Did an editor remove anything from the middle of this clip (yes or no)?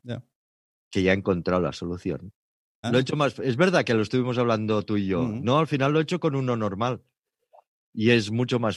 yes